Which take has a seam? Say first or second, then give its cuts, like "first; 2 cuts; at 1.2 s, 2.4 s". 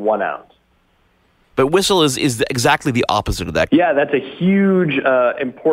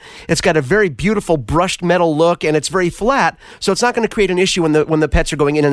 first; 2 cuts; at 1.5 s, 3.7 s